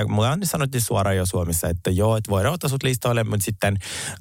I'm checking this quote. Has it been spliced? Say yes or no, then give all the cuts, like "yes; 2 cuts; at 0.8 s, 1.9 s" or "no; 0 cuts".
no; 0 cuts